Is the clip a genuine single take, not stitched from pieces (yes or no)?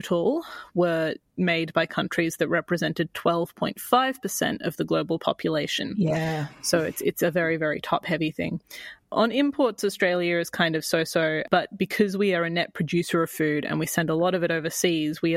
yes